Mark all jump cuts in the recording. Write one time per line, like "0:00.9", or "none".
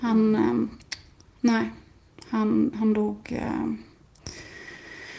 none